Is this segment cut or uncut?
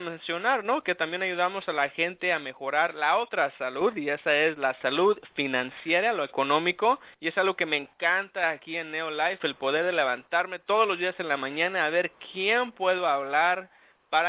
cut